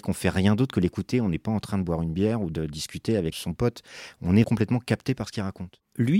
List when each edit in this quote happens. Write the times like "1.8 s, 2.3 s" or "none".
3.3 s, 4.4 s